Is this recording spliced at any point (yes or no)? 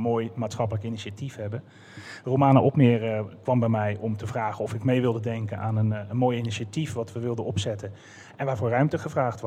no